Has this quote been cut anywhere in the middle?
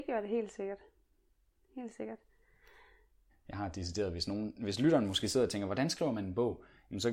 yes; 1 cut; at 3.3 s

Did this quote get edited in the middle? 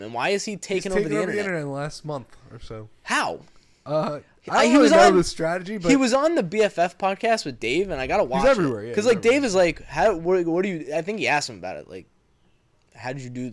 no; 0 cuts

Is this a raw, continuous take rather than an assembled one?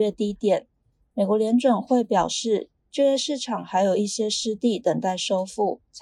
yes; 0 cuts

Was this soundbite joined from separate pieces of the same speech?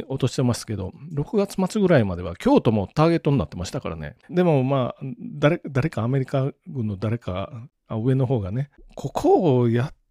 yes; 1 cut; at 4.3 s

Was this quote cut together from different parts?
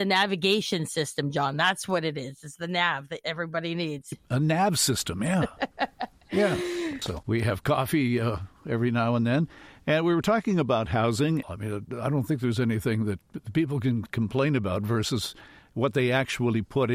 yes; 2 cuts; at 7.0 s, 11.4 s

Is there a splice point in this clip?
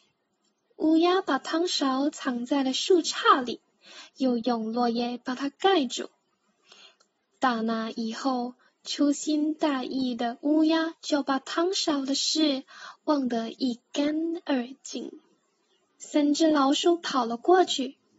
yes; 1 cut; at 15.9 s

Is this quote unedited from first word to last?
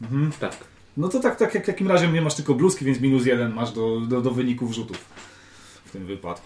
yes; 0 cuts

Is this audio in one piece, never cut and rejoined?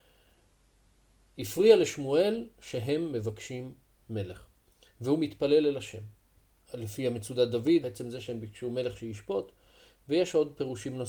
no; 2 cuts; at 6.7 s, 7.8 s

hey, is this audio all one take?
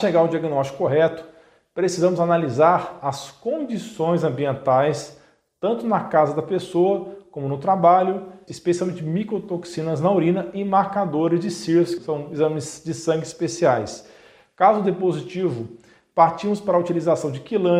no; 2 cuts; at 8.5 s, 12.0 s

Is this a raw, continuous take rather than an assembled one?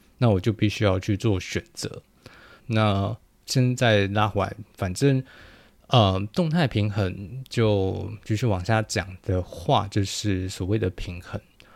no; 1 cut; at 2.6 s

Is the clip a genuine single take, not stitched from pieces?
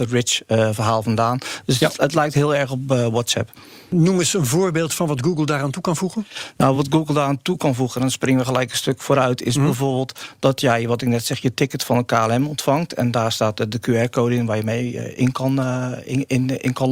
yes; 0 cuts

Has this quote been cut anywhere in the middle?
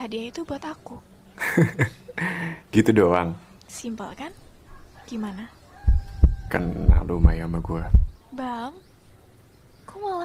no; 0 cuts

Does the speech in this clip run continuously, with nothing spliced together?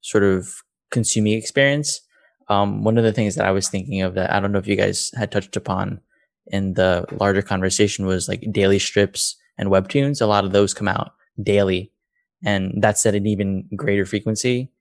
yes; 0 cuts

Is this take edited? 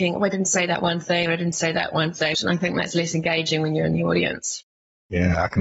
yes; 1 cut; at 2.3 s

